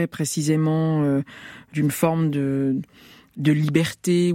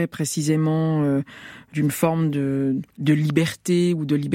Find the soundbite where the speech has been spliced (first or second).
second